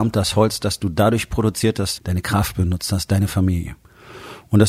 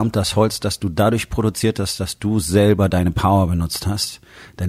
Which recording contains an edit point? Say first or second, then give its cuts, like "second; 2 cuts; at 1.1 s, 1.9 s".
first; 1 cut; at 2.0 s